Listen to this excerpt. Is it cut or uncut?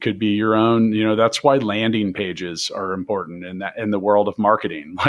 uncut